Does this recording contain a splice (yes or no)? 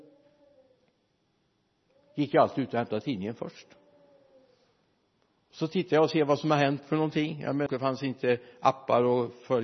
yes